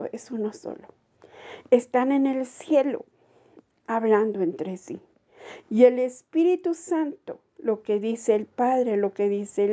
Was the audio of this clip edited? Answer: no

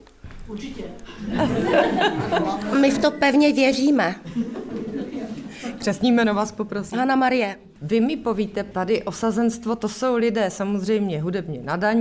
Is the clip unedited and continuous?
yes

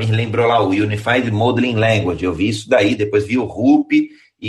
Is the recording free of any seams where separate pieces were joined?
yes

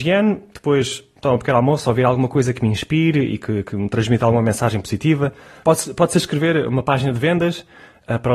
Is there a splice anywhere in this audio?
yes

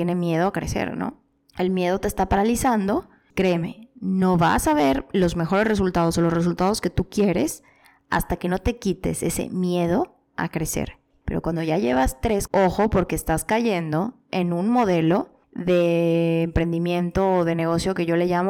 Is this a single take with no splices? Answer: no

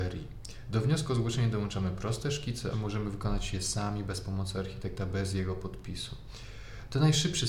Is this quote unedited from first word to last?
no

